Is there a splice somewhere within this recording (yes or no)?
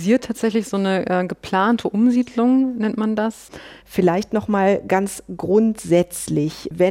yes